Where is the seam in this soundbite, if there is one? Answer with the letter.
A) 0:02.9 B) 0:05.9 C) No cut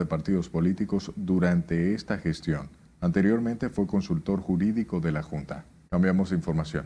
B